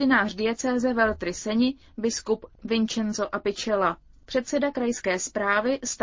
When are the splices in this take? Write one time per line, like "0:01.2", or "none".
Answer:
none